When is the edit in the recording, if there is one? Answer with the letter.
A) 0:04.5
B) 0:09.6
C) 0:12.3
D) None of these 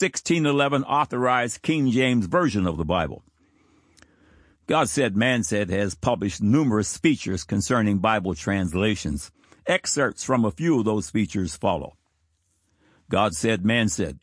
A